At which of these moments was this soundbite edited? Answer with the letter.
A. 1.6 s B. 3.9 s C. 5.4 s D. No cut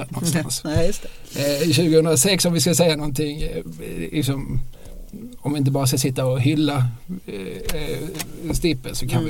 D